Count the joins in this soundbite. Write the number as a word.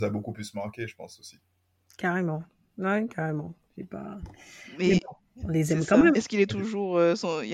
one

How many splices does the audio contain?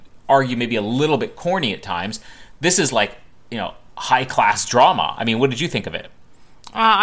zero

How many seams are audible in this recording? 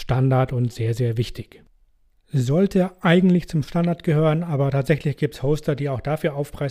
zero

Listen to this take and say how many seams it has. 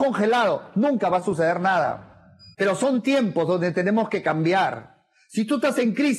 one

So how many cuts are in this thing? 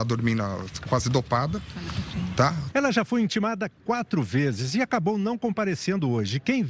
one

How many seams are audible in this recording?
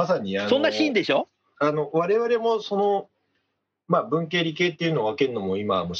one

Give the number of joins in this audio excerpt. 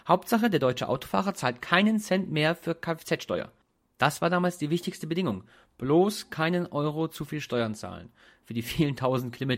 zero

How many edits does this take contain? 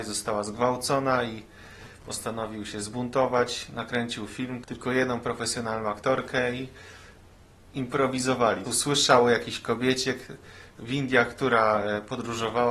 two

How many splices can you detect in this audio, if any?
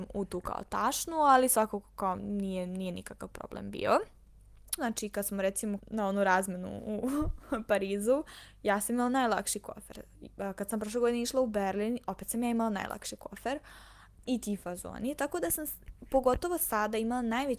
three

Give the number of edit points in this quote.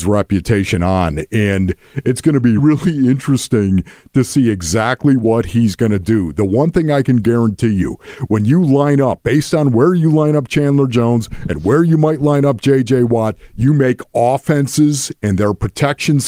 one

